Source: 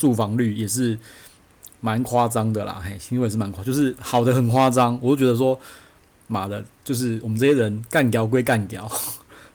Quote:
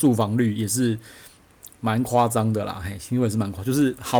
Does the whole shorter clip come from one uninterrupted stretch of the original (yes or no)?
yes